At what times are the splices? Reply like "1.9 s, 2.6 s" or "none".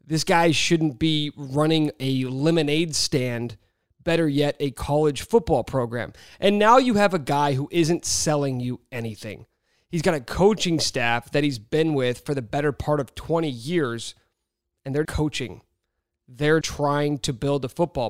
15.1 s, 16.6 s